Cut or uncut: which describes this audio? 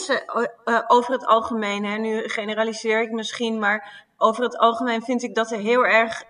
uncut